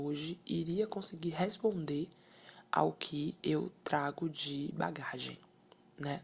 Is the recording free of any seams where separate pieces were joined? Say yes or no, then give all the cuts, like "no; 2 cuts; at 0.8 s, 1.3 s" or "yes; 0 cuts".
no; 1 cut; at 3.4 s